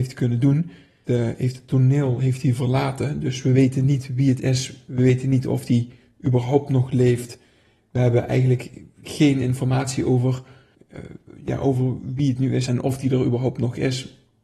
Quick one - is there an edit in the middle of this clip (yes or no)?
yes